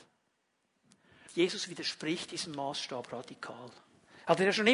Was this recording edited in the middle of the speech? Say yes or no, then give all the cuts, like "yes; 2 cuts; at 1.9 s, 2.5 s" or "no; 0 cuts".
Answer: yes; 1 cut; at 1.3 s